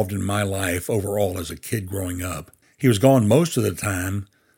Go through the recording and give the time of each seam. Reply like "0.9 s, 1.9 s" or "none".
none